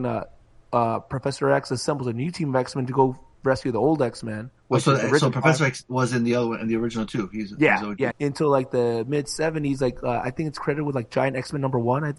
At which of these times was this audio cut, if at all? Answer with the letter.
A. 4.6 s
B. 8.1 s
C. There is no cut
B